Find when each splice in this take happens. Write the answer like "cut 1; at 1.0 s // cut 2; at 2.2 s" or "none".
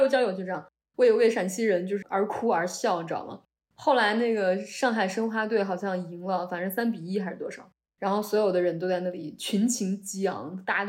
cut 1; at 2.0 s